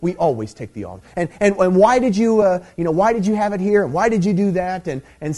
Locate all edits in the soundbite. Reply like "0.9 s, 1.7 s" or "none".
none